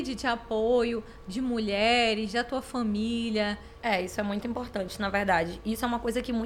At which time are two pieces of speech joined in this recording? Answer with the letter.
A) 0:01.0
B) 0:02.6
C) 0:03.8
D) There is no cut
C